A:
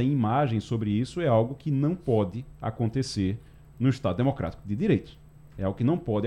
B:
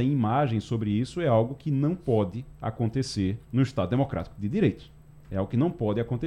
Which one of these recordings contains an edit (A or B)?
B